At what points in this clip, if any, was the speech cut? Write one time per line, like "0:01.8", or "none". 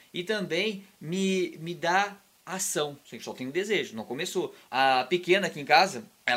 0:03.0
0:04.7